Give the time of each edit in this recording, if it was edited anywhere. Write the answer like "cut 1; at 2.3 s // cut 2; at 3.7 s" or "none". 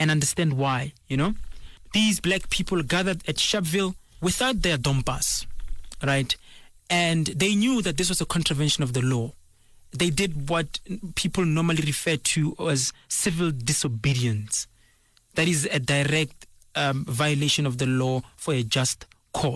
cut 1; at 1.0 s

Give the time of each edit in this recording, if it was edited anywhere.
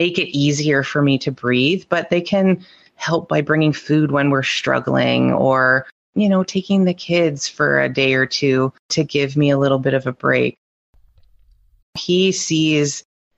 cut 1; at 11.8 s

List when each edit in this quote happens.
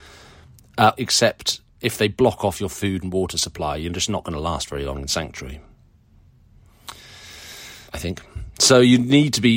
cut 1; at 0.9 s // cut 2; at 7.9 s

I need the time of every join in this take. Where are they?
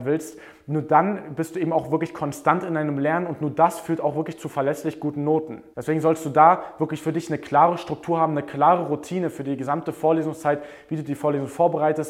cut 1; at 5.7 s

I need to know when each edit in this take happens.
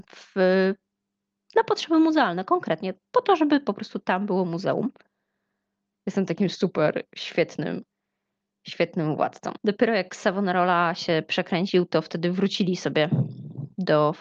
cut 1; at 5.9 s // cut 2; at 9.6 s

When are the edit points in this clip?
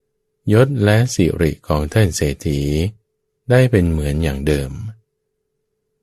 none

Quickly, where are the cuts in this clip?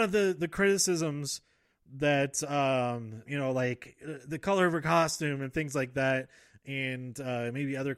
cut 1; at 3.3 s

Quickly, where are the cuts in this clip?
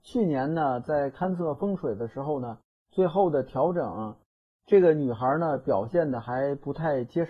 none

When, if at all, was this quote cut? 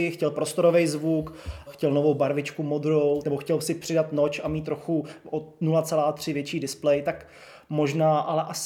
cut 1; at 1.7 s // cut 2; at 3.2 s

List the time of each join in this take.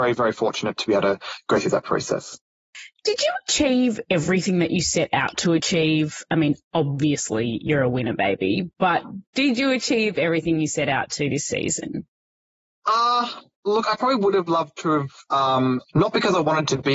cut 1; at 15.8 s

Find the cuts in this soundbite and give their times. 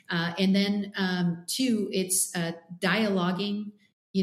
none

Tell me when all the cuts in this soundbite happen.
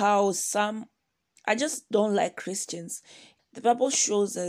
cut 1; at 1.4 s // cut 2; at 3.4 s

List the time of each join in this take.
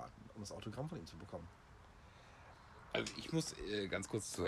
none

